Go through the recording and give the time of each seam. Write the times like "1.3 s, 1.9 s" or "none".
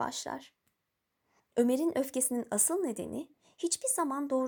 1.4 s